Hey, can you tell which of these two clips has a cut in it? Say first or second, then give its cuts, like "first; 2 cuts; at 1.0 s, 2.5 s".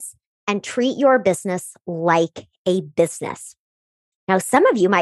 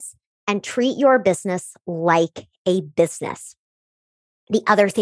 first; 1 cut; at 4.1 s